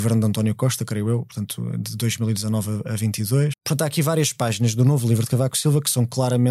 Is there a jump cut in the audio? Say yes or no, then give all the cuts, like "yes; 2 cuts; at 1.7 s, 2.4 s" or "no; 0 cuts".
yes; 1 cut; at 3.5 s